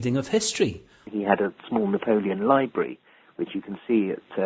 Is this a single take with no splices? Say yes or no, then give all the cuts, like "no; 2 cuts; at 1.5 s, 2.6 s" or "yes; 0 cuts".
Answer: no; 1 cut; at 1.1 s